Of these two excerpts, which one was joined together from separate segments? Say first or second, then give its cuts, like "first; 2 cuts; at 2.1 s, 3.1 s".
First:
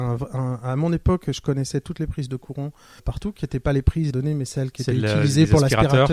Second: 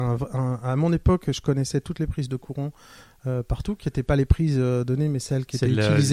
first; 2 cuts; at 3.0 s, 4.1 s